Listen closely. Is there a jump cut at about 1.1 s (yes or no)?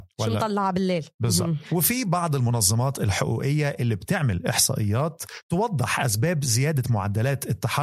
yes